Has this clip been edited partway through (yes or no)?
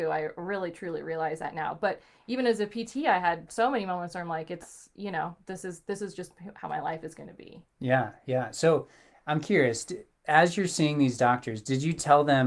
no